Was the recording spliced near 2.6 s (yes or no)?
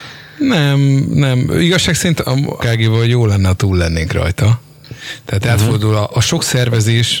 yes